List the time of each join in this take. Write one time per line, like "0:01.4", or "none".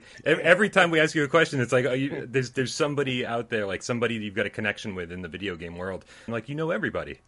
0:06.3